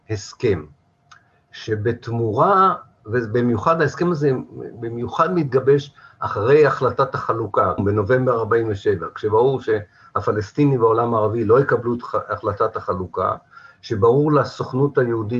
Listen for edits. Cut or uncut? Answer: cut